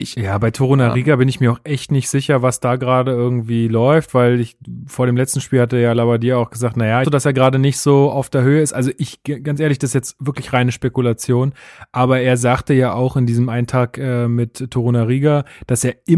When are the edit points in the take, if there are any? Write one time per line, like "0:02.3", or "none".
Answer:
0:07.0